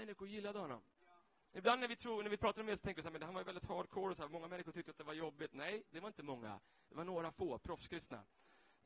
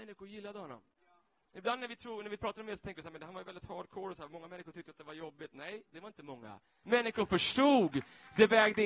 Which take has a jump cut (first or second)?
second